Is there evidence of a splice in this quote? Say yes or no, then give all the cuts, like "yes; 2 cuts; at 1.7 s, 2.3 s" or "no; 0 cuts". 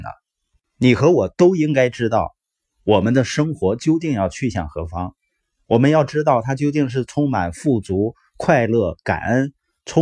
no; 0 cuts